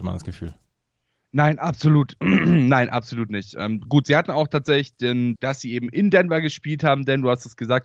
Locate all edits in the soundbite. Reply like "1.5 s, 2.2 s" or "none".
5.3 s

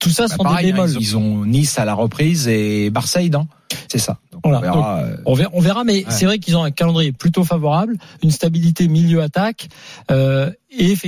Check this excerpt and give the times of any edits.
1.0 s, 3.9 s

